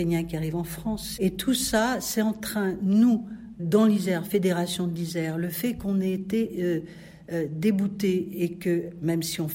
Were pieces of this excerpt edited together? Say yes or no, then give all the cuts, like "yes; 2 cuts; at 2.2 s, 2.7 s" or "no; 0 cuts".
yes; 2 cuts; at 1.2 s, 3.6 s